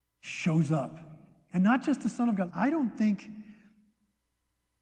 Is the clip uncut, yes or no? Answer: no